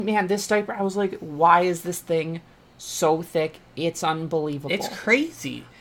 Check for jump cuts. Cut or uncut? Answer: uncut